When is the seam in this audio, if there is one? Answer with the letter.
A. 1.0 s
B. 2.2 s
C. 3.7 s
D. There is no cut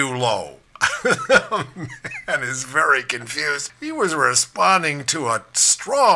D